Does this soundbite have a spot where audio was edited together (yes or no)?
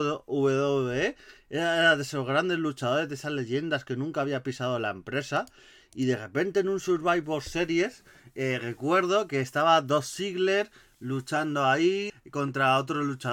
yes